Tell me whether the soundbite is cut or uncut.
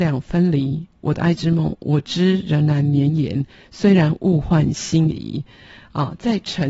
uncut